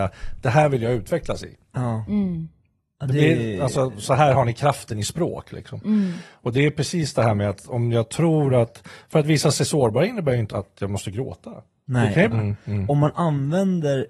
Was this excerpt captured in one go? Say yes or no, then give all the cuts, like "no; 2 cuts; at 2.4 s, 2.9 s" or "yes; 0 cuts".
no; 2 cuts; at 10.5 s, 12.3 s